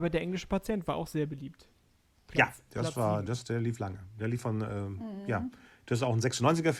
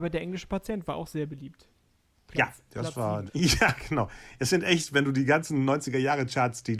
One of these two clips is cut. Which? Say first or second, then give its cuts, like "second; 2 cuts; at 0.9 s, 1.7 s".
second; 1 cut; at 3.3 s